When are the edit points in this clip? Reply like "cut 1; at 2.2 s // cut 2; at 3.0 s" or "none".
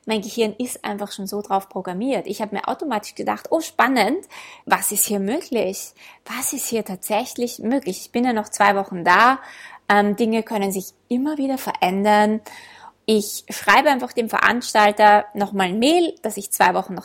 cut 1; at 4.6 s